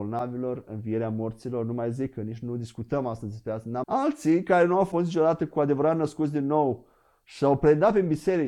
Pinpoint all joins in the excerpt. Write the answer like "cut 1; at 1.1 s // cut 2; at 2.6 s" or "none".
cut 1; at 3.8 s